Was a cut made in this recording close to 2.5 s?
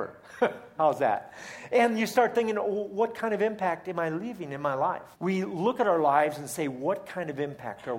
no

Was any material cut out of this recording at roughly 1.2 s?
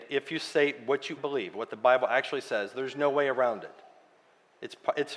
yes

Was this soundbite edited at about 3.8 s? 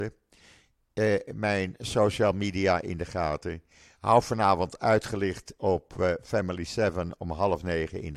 no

